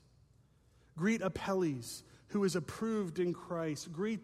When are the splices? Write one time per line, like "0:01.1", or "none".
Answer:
none